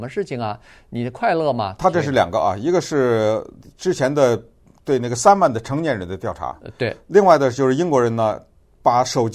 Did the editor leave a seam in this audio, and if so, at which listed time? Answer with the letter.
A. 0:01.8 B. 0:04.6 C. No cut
A